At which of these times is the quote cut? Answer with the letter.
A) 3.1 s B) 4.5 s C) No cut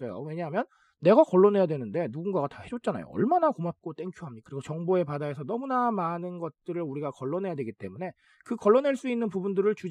B